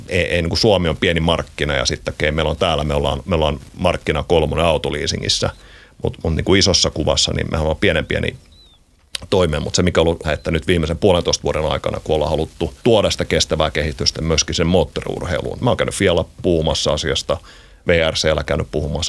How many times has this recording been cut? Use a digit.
3